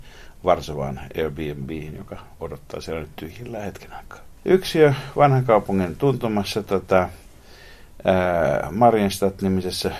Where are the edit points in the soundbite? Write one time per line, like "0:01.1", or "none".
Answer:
0:04.4